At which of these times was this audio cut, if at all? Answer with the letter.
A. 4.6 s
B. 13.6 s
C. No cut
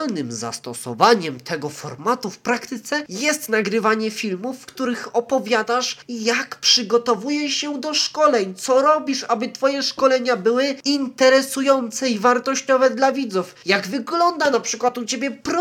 C